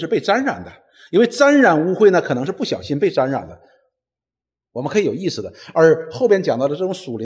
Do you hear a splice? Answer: no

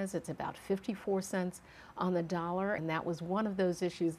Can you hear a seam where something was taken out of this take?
yes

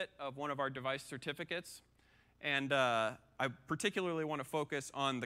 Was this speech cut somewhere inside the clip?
no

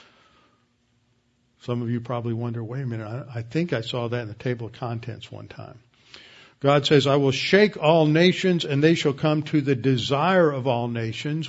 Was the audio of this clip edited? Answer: no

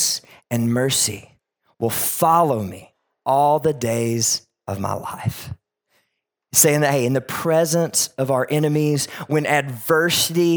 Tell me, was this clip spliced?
no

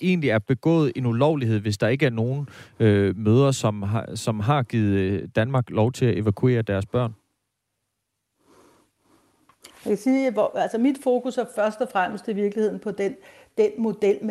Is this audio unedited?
yes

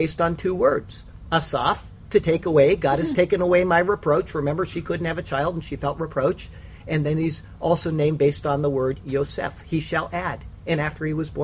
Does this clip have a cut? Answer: no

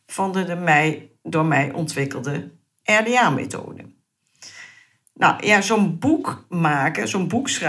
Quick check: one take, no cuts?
yes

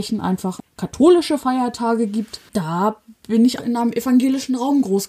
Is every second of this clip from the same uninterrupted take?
no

